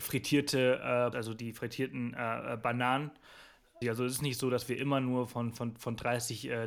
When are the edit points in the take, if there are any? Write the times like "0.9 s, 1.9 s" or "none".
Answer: 1.1 s, 3.8 s